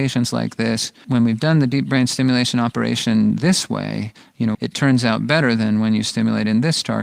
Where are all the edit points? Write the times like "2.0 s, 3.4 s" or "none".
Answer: 1.0 s, 4.5 s